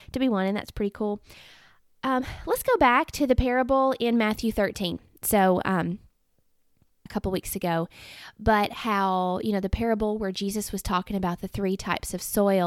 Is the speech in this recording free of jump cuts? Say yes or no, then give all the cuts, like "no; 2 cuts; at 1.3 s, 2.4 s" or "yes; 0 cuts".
no; 1 cut; at 7.1 s